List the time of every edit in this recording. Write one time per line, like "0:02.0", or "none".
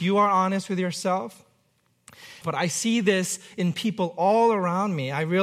0:02.4